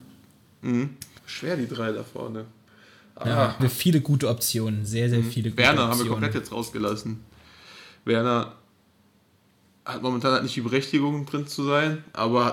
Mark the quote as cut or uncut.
cut